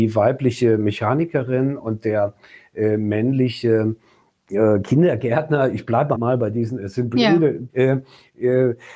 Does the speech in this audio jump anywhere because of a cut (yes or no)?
yes